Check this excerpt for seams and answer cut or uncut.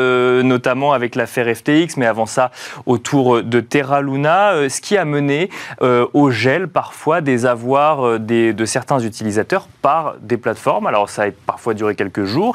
uncut